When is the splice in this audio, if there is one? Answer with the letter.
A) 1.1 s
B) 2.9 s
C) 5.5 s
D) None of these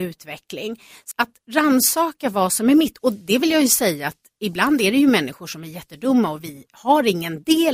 A